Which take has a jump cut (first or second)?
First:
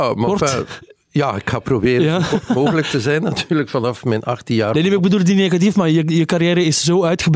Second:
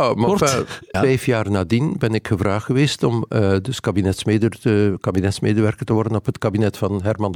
second